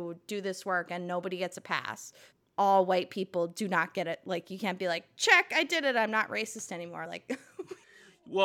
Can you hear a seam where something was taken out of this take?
no; 0 cuts

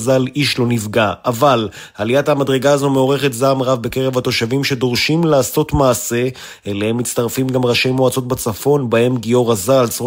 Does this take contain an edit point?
no; 0 cuts

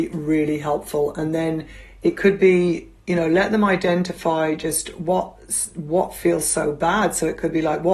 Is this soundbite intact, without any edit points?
yes; 0 cuts

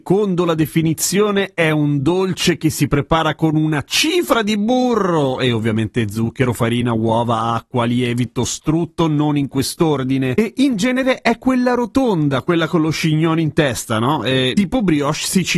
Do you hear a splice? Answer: no; 0 cuts

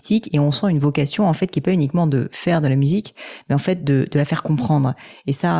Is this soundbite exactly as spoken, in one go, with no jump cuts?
yes; 0 cuts

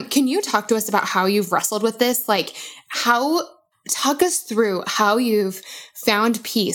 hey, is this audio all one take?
yes; 0 cuts

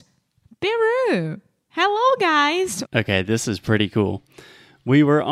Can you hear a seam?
yes; 1 cut; at 2.8 s

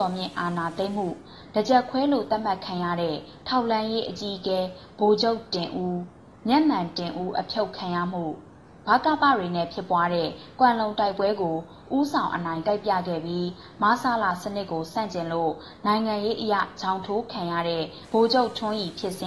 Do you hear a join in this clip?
no; 0 cuts

